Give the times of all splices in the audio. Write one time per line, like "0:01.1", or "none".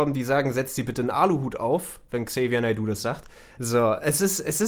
0:03.6